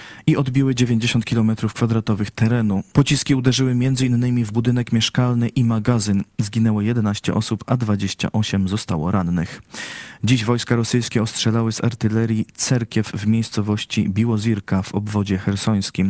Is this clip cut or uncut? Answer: cut